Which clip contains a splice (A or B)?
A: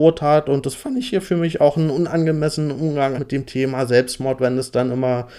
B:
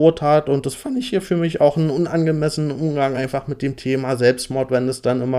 A